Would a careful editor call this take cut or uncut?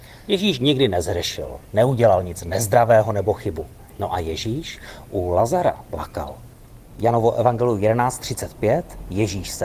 cut